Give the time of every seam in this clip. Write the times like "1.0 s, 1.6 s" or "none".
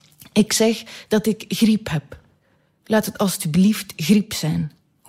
none